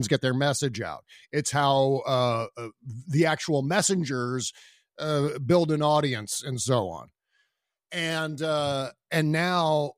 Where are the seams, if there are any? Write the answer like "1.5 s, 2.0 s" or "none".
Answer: none